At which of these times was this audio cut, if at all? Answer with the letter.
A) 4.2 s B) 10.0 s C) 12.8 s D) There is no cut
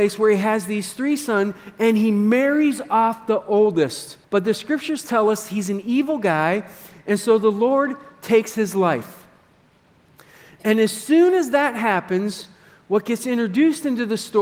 A